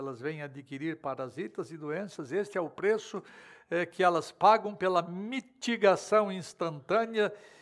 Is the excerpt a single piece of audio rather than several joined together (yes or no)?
yes